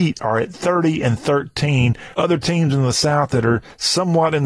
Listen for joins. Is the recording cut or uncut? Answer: cut